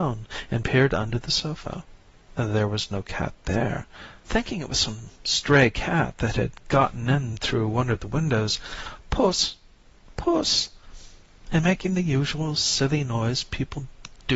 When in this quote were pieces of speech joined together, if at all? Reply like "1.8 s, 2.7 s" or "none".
4.2 s, 9.0 s